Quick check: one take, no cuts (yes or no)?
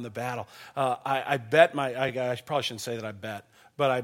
yes